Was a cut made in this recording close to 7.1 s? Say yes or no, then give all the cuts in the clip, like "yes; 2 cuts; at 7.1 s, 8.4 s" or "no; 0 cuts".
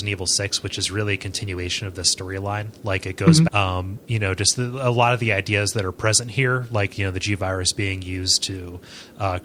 no; 1 cut; at 3.5 s